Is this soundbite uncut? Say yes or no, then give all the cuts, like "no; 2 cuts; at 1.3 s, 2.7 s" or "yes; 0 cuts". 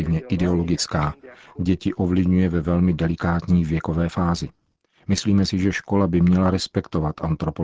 yes; 0 cuts